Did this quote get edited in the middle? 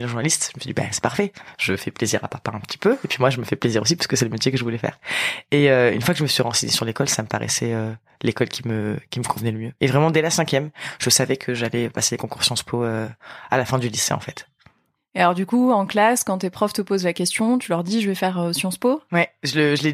no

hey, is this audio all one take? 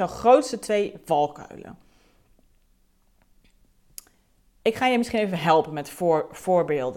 yes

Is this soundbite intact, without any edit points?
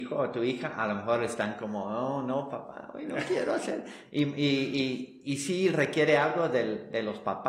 yes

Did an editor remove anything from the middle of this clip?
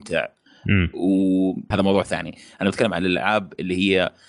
yes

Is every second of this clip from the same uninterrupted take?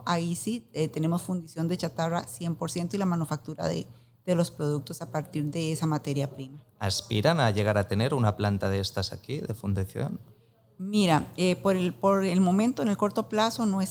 yes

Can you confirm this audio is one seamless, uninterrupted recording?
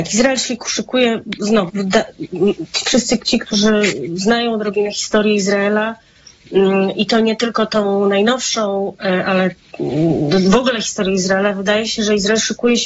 no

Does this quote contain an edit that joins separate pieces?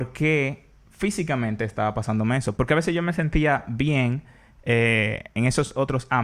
yes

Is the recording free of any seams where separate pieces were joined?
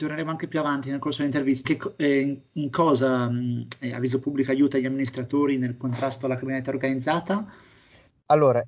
no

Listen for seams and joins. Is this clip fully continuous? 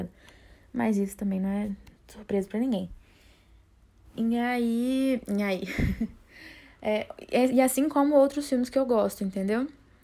yes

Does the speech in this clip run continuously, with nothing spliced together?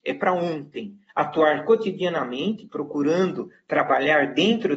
no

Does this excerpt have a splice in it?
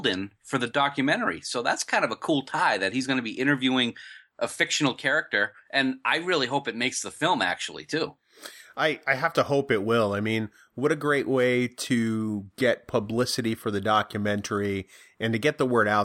no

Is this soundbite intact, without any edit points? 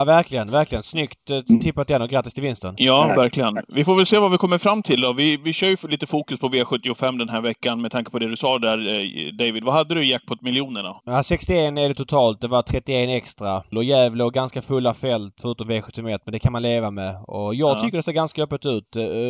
no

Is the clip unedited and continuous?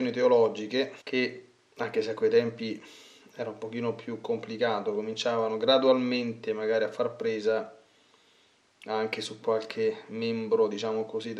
no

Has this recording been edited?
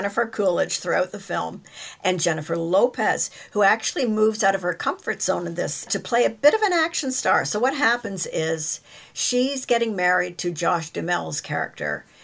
yes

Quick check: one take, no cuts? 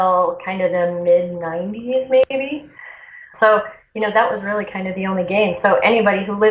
no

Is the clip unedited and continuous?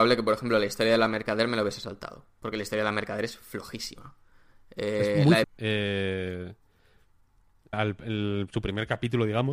no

